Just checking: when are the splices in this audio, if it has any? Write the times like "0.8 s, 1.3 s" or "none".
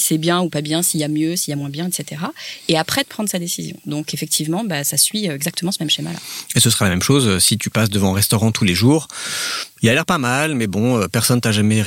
none